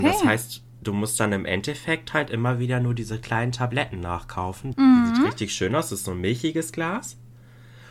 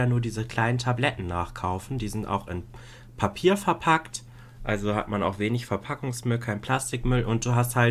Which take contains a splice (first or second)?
first